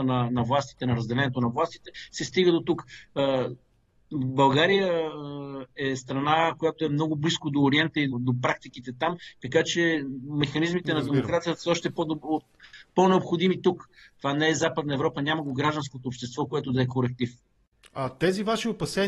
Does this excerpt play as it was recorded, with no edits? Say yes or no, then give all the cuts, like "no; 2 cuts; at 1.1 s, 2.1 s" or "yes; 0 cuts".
no; 1 cut; at 8.1 s